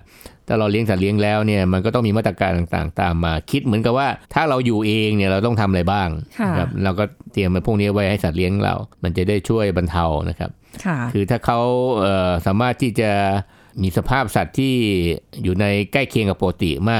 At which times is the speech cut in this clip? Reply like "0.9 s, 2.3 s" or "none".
4.2 s, 8.9 s